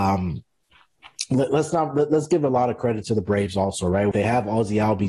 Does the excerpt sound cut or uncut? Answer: cut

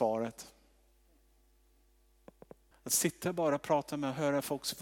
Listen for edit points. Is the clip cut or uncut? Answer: cut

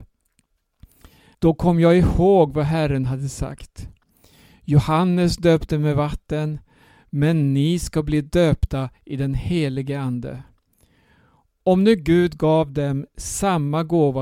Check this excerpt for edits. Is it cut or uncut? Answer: cut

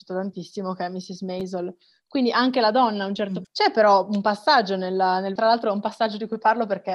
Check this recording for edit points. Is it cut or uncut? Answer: cut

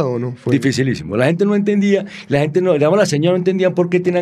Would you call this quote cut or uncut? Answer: uncut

